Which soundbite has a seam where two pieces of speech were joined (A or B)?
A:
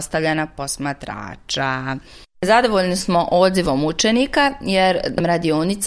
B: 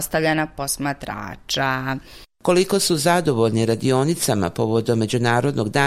A